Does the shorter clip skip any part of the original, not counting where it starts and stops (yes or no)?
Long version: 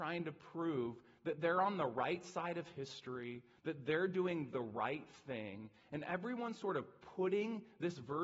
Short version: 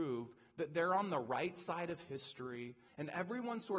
yes